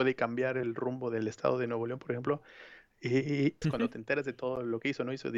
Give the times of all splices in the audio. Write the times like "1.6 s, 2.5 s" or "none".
3.6 s